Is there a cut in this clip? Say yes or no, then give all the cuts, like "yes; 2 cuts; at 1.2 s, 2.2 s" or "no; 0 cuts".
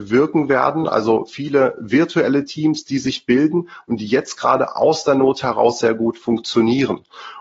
no; 0 cuts